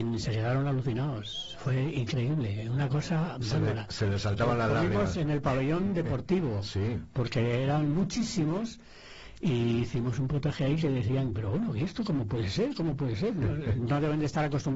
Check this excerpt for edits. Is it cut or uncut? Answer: cut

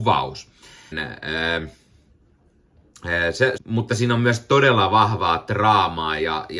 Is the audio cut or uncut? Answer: cut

